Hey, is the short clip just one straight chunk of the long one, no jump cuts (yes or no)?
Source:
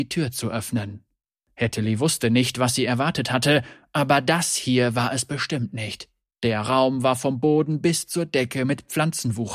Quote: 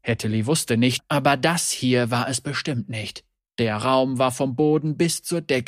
no